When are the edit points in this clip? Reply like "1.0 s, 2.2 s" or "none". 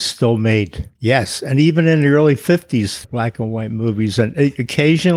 1.0 s, 3.0 s